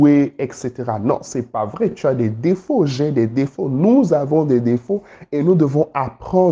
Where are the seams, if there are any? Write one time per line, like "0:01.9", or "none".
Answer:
none

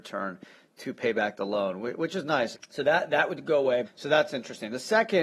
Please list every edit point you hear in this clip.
0:02.5
0:03.8

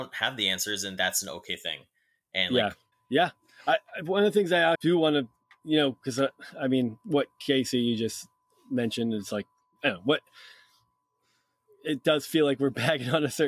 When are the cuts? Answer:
0:02.9
0:04.7

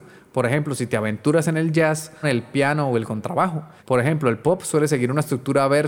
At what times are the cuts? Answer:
0:02.2
0:03.8

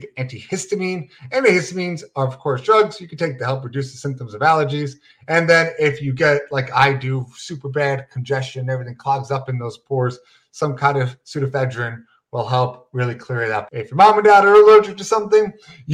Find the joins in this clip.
0:13.7

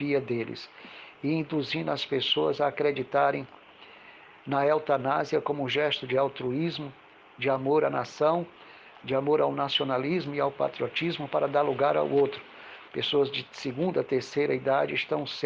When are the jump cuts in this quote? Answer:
0:12.9

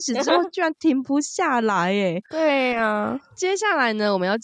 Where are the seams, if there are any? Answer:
0:02.2

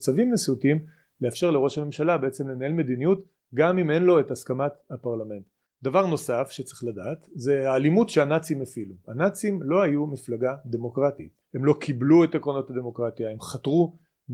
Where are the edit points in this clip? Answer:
0:05.7
0:09.0
0:11.4

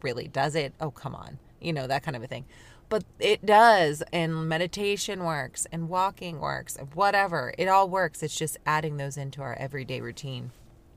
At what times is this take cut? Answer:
none

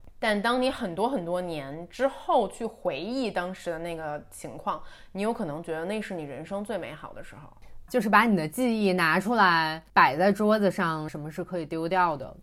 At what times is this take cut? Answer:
0:07.9
0:11.1

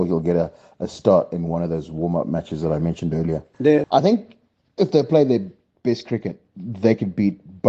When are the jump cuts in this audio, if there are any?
0:03.8

